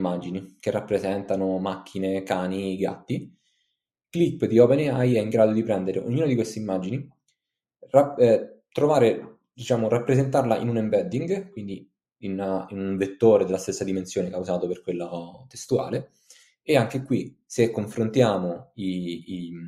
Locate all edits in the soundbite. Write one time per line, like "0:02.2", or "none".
none